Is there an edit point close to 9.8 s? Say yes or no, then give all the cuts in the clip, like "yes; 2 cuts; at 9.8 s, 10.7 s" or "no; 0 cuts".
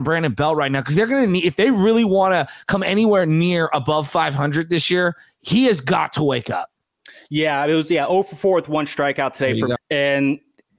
yes; 1 cut; at 9.8 s